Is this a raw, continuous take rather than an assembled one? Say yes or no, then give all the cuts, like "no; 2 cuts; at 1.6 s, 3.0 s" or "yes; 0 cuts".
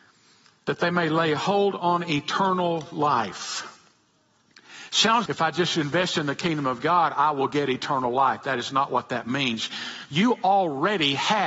no; 1 cut; at 5.3 s